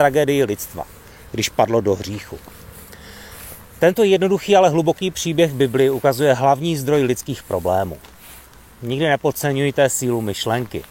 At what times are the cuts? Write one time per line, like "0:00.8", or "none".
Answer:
none

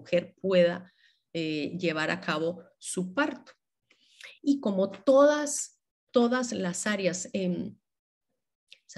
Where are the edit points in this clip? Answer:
none

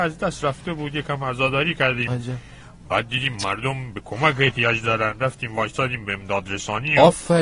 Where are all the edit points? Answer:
none

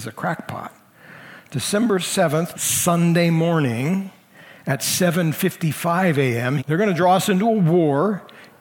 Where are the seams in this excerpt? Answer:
0:02.5
0:06.6

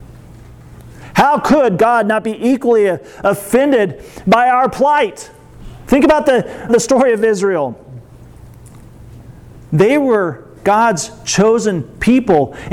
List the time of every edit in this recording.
0:06.7

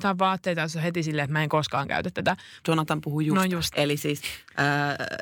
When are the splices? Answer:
0:02.6
0:03.7

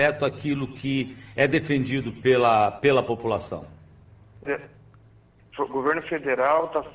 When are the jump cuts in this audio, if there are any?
0:04.4

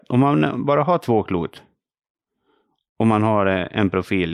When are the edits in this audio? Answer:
none

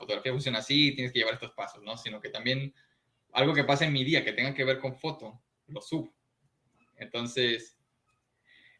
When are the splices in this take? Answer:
none

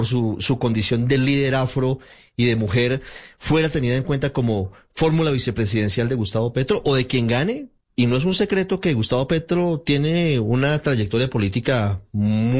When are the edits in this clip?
0:07.9

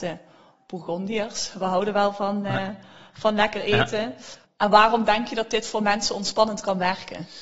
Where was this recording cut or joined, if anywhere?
0:04.4

